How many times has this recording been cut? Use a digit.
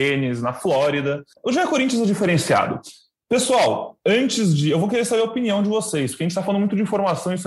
0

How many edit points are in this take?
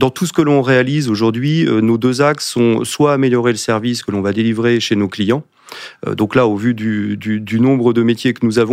0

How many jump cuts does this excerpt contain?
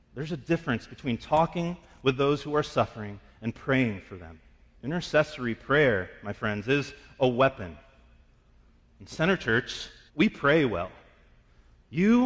2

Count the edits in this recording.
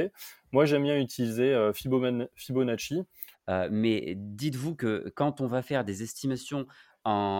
1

